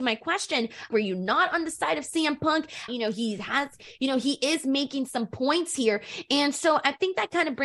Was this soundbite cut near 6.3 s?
no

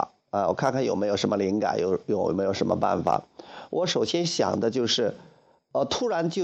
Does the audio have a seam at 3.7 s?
no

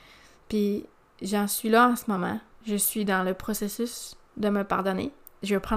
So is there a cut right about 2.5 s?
yes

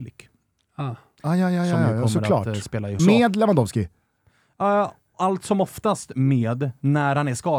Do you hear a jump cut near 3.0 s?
yes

